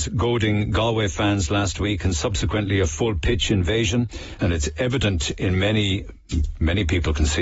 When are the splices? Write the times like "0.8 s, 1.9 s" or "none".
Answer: 4.4 s